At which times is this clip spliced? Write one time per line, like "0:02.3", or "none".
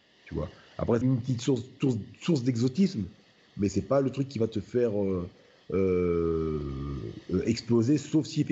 0:01.0